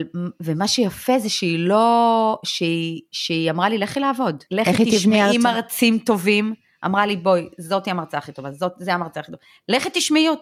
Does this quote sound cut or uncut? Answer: cut